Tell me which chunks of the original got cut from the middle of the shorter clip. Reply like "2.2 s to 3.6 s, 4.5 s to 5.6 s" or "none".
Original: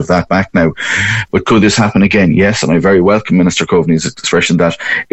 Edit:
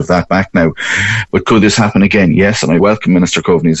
2.8 s to 3.0 s